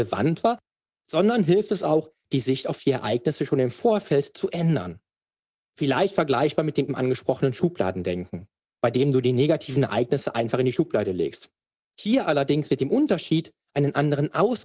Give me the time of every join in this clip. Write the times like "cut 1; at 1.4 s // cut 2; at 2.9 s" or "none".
cut 1; at 6.9 s

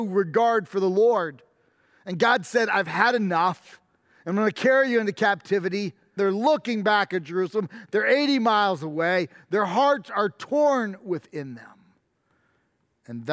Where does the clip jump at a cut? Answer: cut 1; at 6.2 s

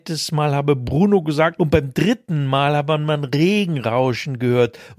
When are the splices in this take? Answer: cut 1; at 1.6 s

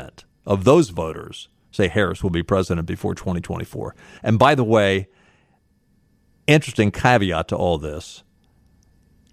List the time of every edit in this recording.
cut 1; at 4.2 s

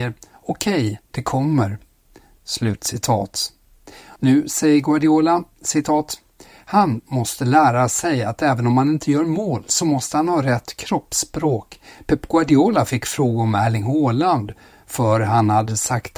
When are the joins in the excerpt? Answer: cut 1; at 4.2 s // cut 2; at 12.0 s

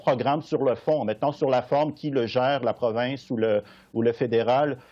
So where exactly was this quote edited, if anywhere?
none

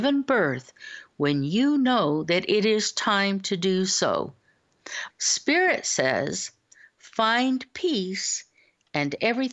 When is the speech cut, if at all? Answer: cut 1; at 5.1 s

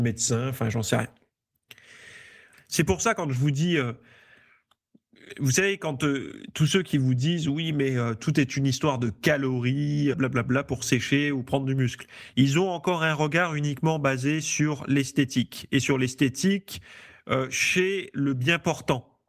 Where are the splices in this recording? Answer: cut 1; at 2.5 s // cut 2; at 10.1 s

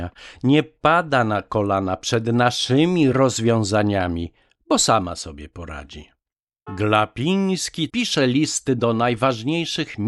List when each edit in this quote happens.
cut 1; at 6.7 s // cut 2; at 7.9 s

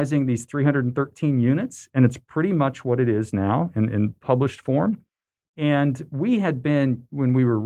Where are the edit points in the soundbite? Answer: none

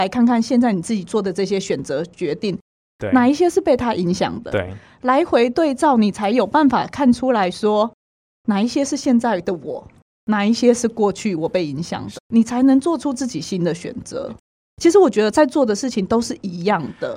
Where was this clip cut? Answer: cut 1; at 12.1 s

